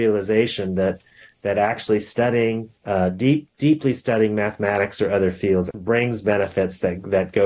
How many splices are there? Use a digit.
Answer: 2